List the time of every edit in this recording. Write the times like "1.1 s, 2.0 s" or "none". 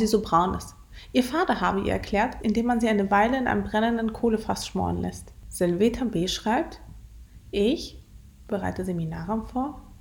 2.4 s